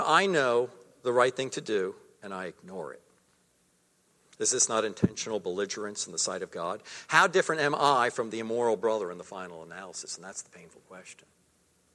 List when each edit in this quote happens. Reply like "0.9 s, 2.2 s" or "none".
none